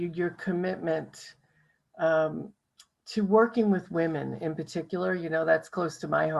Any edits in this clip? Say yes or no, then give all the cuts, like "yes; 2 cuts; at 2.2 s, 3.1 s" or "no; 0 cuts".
no; 0 cuts